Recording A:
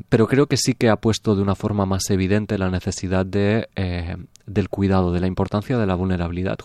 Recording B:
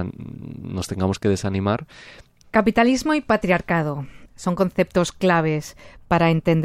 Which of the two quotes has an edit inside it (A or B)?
B